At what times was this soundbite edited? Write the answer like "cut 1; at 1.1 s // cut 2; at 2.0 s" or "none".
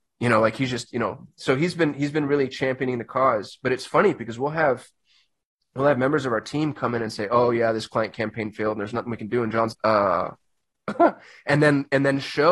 cut 1; at 9.7 s